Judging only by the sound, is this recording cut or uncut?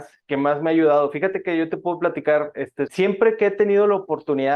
cut